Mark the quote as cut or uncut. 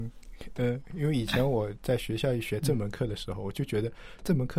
uncut